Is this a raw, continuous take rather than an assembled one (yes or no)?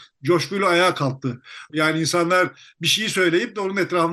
no